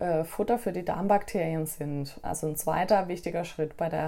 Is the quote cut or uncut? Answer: cut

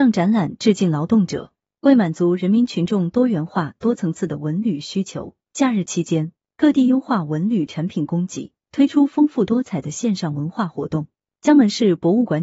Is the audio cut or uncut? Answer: uncut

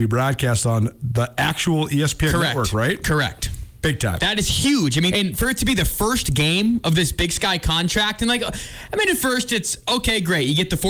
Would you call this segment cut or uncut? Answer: cut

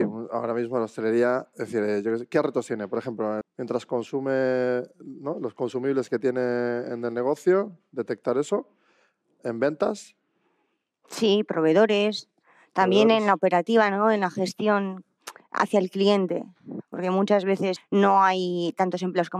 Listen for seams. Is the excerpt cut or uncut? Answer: cut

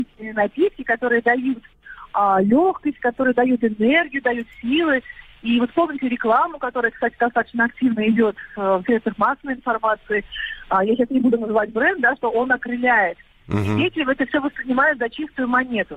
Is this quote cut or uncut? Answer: uncut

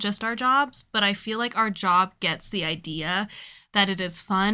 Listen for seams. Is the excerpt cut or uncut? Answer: uncut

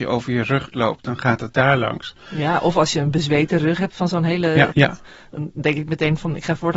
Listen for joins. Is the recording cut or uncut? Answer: cut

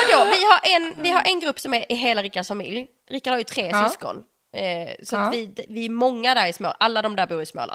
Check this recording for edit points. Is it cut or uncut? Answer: uncut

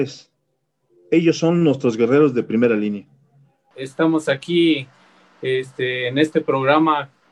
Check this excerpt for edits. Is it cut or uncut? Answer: cut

